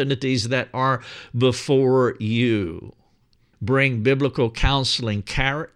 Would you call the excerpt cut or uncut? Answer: cut